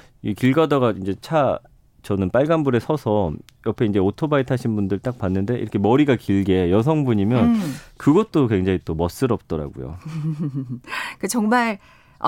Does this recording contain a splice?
no; 0 cuts

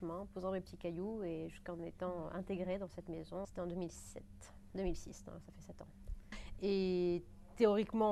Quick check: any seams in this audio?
yes; 2 cuts; at 3.4 s, 6.6 s

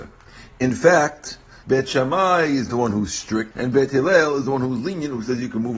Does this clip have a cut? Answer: yes; 2 cuts; at 1.6 s, 3.5 s

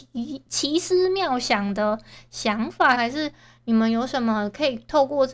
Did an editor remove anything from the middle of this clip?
yes; 1 cut; at 2.9 s

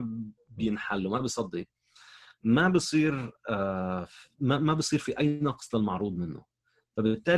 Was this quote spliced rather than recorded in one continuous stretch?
no; 0 cuts

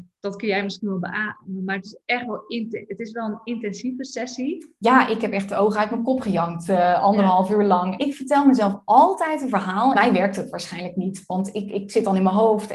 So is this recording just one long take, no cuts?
no; 2 cuts; at 8.0 s, 9.9 s

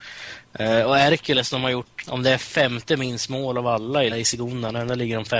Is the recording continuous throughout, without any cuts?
no; 2 cuts; at 2.0 s, 4.1 s

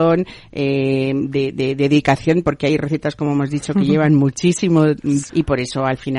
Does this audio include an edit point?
yes; 1 cut; at 5.3 s

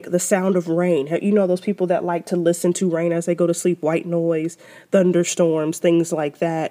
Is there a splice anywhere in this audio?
no; 0 cuts

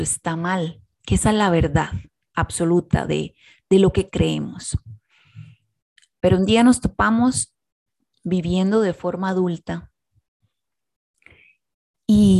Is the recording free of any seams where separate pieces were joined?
yes; 0 cuts

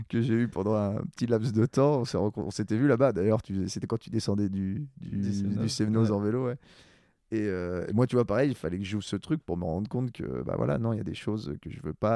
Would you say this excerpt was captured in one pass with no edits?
yes; 0 cuts

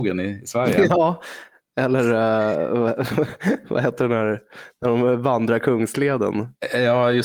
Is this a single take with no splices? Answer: yes; 0 cuts

